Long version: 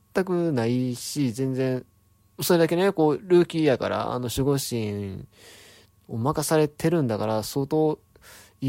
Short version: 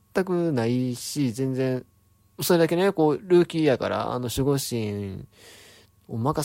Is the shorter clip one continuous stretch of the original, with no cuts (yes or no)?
yes